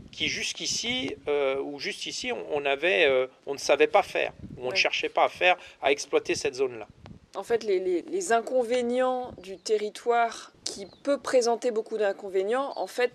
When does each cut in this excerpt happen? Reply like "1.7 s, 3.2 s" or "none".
8.0 s, 10.5 s